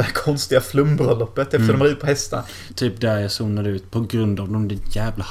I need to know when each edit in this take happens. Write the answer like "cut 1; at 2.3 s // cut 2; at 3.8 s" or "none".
cut 1; at 2.7 s